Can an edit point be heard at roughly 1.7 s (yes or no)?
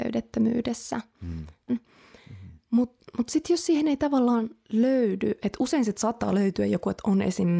yes